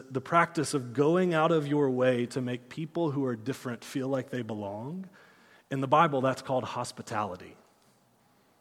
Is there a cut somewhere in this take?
no; 0 cuts

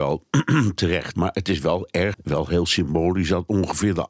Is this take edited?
yes; 2 cuts; at 1.1 s, 2.1 s

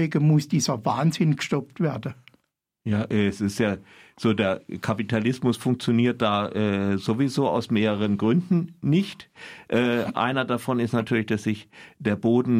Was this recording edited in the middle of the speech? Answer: no; 0 cuts

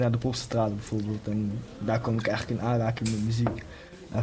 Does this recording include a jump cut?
no; 0 cuts

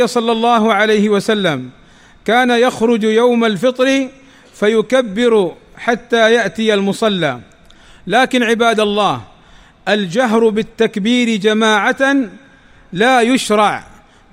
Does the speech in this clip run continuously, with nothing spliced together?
yes; 0 cuts

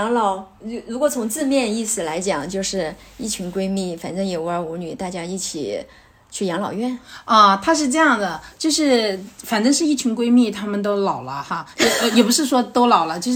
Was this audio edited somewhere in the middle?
no; 0 cuts

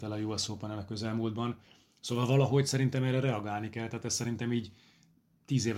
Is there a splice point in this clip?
no; 0 cuts

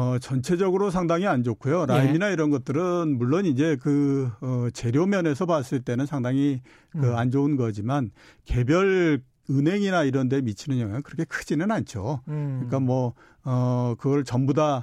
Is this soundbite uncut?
yes; 0 cuts

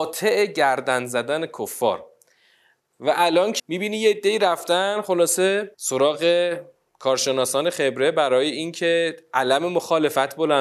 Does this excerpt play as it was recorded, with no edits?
no; 2 cuts; at 3.6 s, 5.7 s

